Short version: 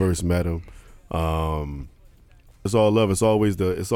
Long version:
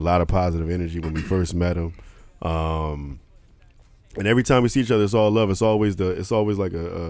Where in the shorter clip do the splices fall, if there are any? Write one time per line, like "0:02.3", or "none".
0:02.7

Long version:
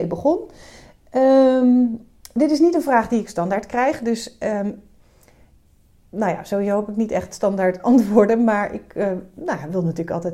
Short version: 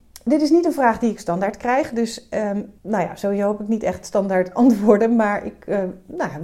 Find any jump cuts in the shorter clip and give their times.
0:02.8

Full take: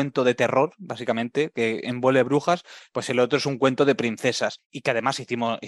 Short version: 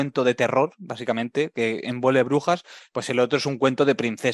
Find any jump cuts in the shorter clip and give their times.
none

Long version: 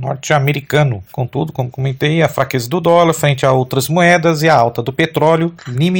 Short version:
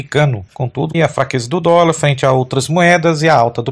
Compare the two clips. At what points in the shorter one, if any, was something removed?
0:00.9

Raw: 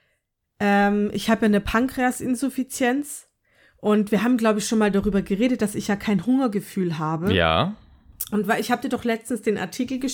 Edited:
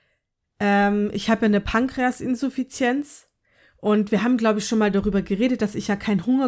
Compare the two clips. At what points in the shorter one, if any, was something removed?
none

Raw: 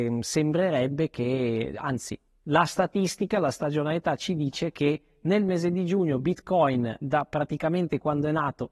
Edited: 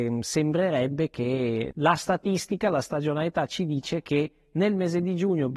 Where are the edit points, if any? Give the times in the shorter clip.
0:01.7

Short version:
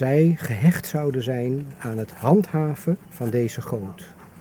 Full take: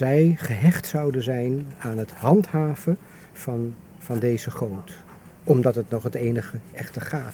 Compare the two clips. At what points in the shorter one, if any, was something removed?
0:03.0

